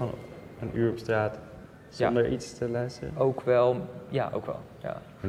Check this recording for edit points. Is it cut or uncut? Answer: uncut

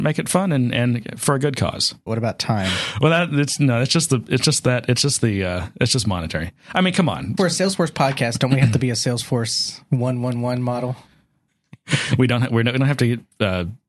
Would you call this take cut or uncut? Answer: cut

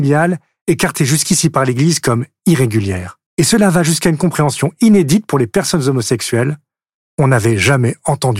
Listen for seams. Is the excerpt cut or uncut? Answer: cut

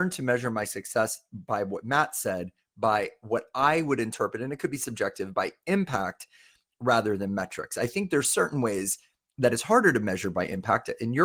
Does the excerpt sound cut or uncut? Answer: uncut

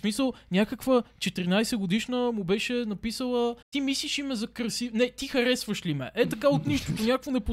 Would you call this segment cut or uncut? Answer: cut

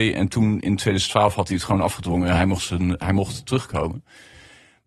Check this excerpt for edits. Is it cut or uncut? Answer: uncut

